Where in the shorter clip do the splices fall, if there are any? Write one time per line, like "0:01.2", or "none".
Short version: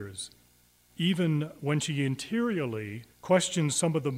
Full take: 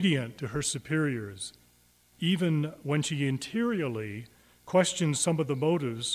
0:03.1